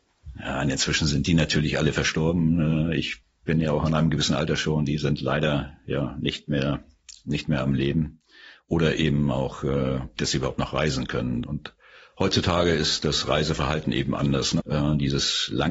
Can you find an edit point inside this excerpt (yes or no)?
yes